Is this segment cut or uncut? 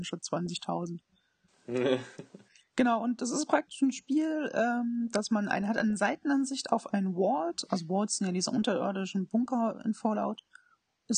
uncut